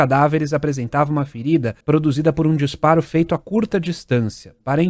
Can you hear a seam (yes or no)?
yes